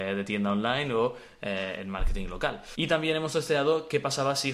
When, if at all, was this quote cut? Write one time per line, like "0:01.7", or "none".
none